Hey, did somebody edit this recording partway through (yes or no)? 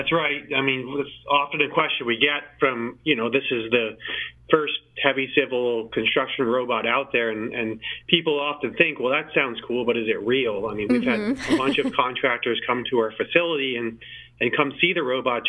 no